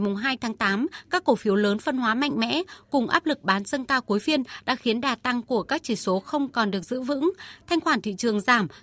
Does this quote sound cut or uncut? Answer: uncut